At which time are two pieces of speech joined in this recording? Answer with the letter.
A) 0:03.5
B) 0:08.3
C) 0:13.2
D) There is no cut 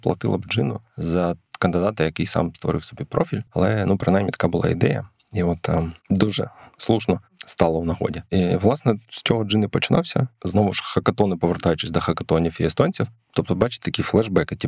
A